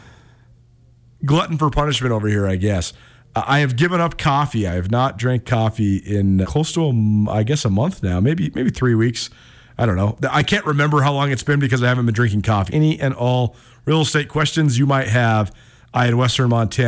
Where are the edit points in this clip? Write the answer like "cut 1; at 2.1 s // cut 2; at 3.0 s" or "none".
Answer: cut 1; at 6.4 s // cut 2; at 12.7 s